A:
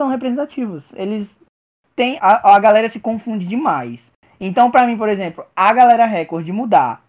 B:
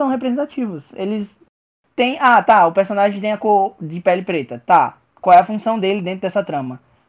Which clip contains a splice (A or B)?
A